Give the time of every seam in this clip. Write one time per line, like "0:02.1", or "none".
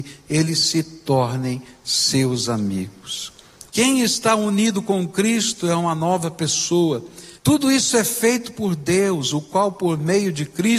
0:03.7
0:07.4